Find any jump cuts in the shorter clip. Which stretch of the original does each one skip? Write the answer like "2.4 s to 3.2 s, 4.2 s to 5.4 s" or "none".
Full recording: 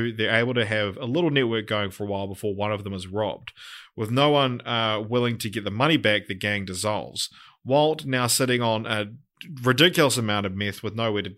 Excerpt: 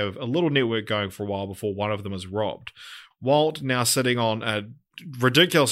3.9 s to 7.5 s